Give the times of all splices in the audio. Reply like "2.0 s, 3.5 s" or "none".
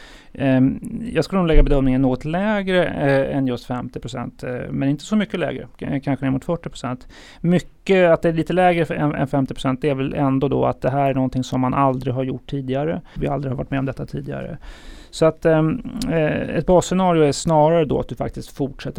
13.2 s